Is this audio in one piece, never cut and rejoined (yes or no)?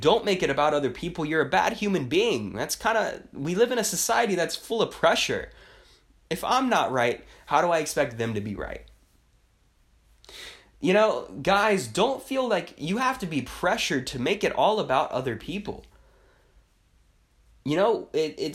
no